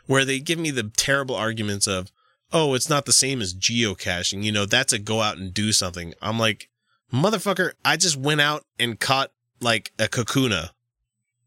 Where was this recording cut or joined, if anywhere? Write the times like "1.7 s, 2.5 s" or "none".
none